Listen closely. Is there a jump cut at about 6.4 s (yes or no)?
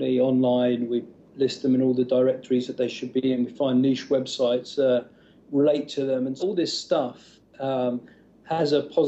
yes